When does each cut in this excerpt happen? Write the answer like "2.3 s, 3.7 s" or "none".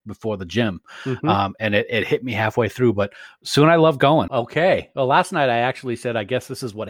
4.3 s